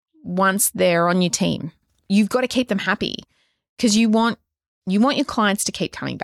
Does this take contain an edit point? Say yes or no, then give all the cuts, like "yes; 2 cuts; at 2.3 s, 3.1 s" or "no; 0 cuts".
no; 0 cuts